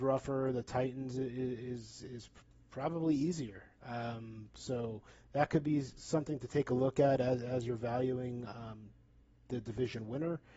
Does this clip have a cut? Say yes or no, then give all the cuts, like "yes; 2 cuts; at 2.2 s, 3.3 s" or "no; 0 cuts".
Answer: no; 0 cuts